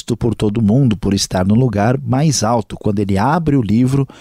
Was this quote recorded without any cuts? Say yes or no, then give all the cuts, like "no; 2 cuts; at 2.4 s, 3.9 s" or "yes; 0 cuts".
yes; 0 cuts